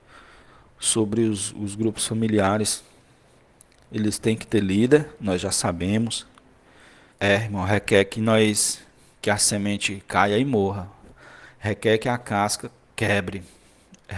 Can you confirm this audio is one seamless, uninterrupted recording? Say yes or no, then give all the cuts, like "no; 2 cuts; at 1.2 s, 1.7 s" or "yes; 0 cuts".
no; 1 cut; at 7.1 s